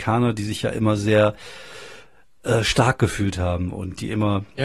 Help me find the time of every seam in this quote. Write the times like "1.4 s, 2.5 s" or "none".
none